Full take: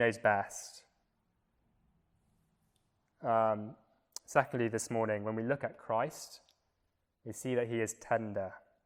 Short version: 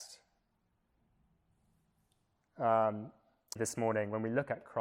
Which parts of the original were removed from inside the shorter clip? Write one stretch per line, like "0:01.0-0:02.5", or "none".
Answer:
0:04.2-0:04.7

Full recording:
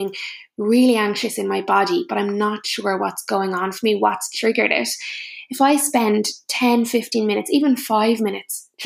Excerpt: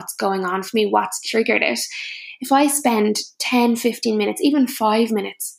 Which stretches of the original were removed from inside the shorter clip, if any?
none

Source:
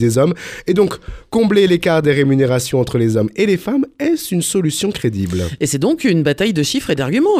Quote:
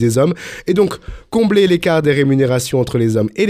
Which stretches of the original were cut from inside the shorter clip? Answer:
none

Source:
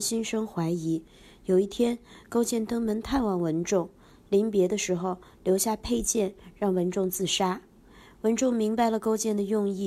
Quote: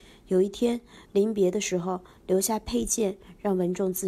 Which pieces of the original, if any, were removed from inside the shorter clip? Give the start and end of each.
0:02.2-0:04.2

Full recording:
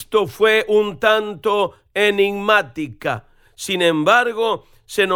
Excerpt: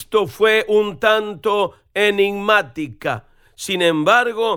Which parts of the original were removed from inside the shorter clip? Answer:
none

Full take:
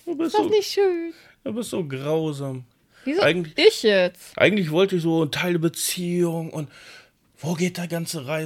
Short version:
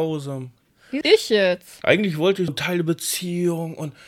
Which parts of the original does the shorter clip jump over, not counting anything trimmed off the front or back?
0:03.1-0:03.5
0:05.0-0:05.2

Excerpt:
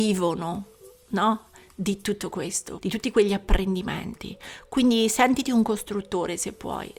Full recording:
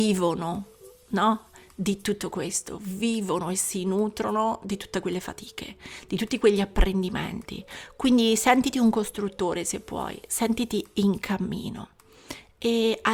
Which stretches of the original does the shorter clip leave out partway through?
0:02.8-0:06.1

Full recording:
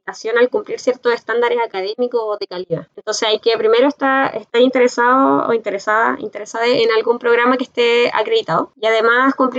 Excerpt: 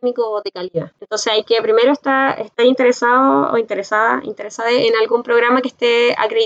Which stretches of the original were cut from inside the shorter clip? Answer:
none

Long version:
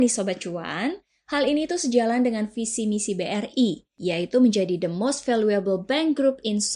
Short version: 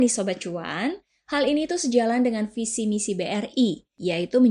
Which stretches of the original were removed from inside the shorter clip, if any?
none

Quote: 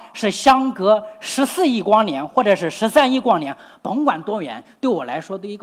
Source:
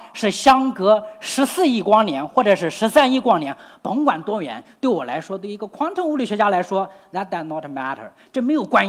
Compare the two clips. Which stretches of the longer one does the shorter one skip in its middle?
none

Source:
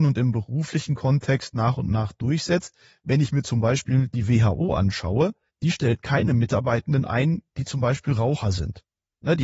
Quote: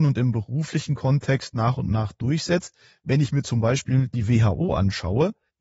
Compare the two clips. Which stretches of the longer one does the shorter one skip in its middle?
none

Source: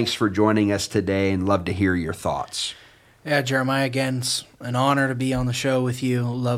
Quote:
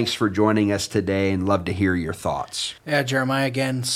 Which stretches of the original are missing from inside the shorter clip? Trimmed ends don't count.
0:02.8-0:03.2

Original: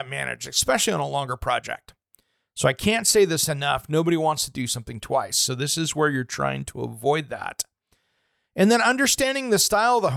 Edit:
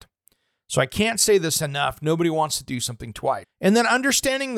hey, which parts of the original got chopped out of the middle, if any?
0:05.3-0:08.4

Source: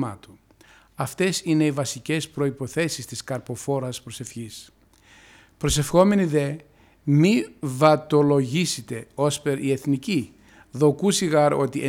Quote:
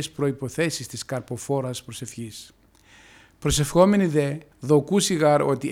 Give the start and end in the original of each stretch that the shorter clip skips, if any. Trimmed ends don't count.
0:06.7-0:10.6

